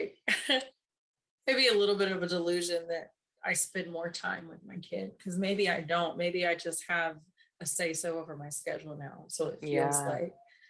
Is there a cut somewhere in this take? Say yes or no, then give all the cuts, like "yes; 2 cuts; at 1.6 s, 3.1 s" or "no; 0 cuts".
no; 0 cuts